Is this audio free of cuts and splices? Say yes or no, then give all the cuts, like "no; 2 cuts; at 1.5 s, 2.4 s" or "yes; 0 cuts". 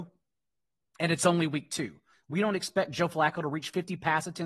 no; 1 cut; at 2.1 s